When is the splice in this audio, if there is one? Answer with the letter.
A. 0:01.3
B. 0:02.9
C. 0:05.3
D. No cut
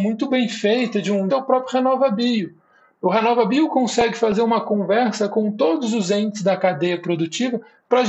A